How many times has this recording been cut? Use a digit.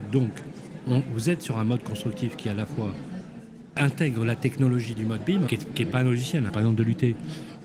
2